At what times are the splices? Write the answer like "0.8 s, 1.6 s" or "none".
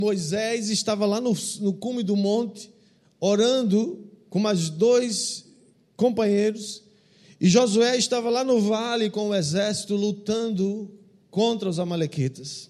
none